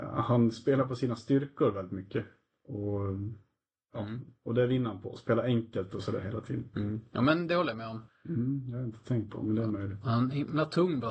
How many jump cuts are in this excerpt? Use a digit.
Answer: 1